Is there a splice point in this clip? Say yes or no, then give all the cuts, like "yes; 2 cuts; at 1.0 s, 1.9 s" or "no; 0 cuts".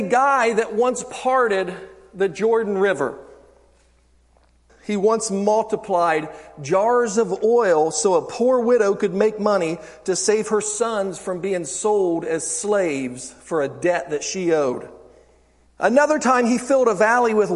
yes; 2 cuts; at 4.7 s, 15.7 s